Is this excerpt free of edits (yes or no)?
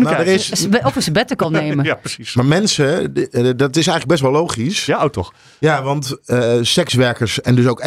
yes